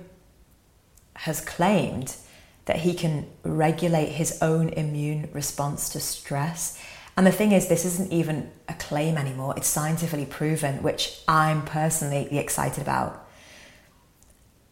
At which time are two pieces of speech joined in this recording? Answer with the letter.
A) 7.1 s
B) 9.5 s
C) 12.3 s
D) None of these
C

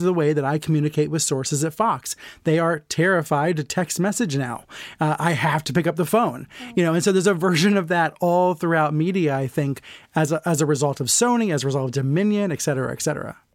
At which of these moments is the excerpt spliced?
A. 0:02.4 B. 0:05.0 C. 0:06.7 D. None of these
D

